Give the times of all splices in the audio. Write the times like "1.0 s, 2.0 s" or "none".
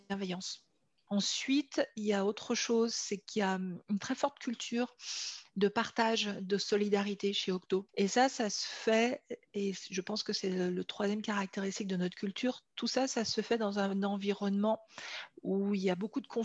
1.1 s, 7.9 s